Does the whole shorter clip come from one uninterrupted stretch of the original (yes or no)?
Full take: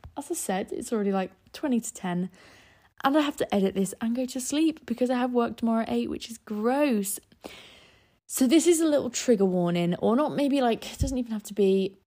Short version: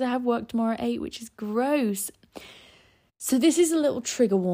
yes